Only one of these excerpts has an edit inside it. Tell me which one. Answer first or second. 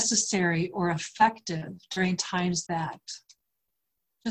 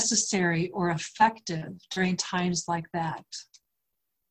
first